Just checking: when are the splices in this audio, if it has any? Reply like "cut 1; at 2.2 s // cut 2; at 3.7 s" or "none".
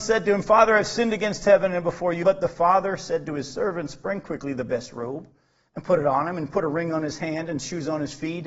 cut 1; at 2.2 s